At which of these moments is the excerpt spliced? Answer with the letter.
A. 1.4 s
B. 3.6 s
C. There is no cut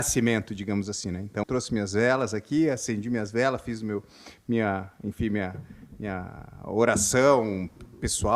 A